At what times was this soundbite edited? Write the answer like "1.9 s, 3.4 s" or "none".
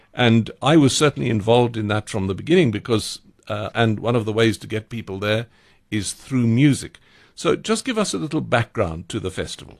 3.7 s